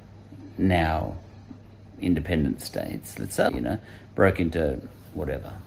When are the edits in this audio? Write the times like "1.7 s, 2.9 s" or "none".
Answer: 3.5 s